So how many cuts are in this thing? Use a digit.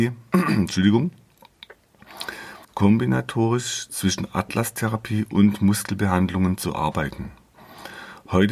1